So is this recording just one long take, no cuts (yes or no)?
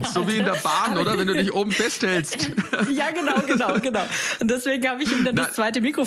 yes